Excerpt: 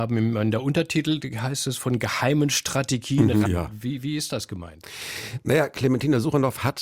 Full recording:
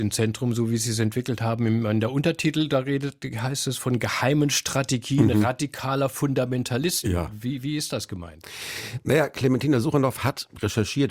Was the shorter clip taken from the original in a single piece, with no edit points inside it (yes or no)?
no